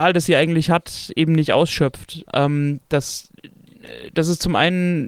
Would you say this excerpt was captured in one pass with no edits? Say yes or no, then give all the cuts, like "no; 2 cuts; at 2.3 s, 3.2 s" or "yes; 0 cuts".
no; 1 cut; at 2.3 s